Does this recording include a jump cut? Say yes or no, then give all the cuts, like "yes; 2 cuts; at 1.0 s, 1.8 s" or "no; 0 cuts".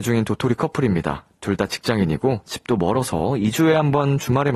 no; 0 cuts